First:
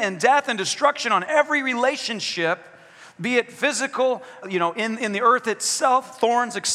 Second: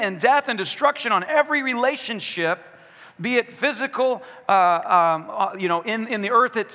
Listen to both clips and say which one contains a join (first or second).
first